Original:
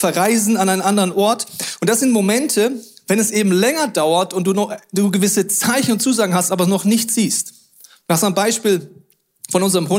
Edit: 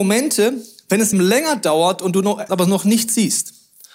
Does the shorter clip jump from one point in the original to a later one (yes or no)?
yes